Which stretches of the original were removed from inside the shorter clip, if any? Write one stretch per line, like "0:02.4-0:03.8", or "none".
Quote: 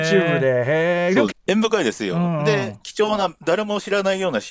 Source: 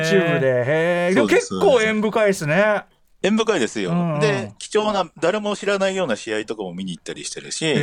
0:01.3-0:03.0